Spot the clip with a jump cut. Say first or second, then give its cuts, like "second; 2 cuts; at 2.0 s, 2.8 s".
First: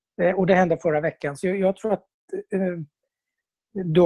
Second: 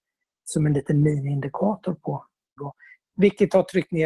second; 1 cut; at 2.6 s